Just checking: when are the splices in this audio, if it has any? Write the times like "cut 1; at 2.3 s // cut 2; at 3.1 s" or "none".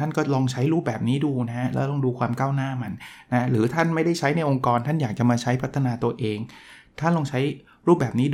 none